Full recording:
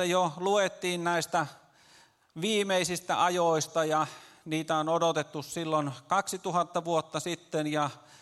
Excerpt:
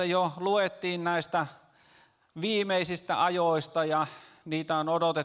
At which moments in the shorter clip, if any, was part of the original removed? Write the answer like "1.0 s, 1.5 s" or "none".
none